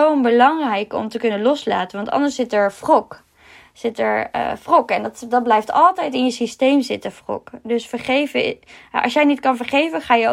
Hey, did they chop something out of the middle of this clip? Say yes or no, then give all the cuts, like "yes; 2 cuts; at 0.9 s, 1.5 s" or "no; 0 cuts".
no; 0 cuts